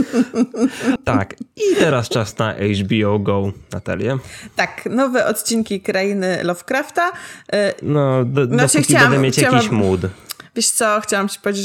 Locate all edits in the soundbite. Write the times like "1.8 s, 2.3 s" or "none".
7.8 s